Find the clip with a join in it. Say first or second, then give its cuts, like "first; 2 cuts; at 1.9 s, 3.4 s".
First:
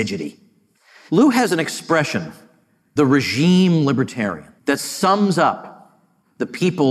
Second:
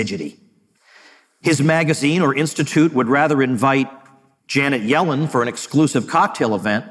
first; 2 cuts; at 1.1 s, 4.6 s